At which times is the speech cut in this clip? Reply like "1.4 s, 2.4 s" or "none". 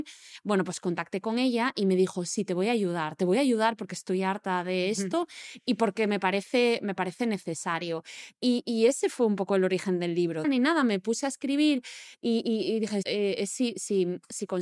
10.4 s, 13.0 s